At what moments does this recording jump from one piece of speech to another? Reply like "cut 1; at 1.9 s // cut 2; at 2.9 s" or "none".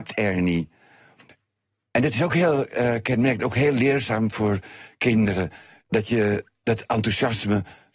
none